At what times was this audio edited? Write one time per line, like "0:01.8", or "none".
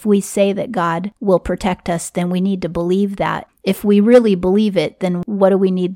none